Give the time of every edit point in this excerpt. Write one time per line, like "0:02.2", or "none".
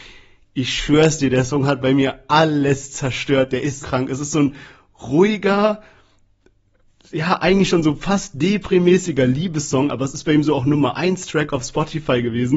0:03.8